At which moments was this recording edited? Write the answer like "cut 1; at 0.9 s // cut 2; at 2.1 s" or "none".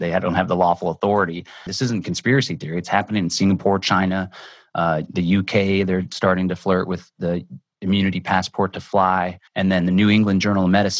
cut 1; at 1.7 s // cut 2; at 9.5 s